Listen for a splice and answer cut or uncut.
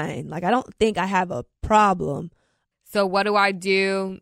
cut